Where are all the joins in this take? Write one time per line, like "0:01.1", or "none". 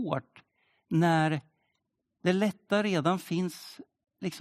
none